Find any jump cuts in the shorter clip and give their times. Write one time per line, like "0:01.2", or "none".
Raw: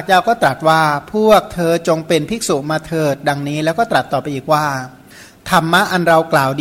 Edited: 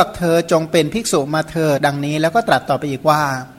0:01.8